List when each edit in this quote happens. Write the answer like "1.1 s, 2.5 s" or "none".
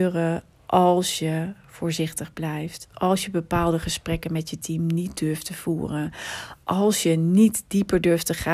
2.9 s